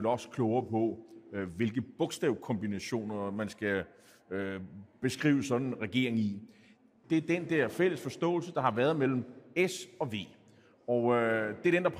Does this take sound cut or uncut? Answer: cut